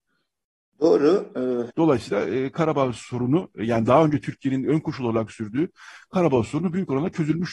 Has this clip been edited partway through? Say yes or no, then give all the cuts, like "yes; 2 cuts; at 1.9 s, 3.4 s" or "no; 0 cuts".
yes; 1 cut; at 1.7 s